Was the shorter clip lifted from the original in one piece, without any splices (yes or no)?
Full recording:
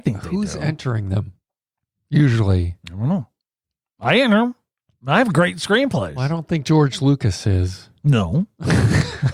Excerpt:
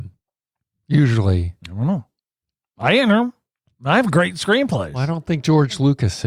yes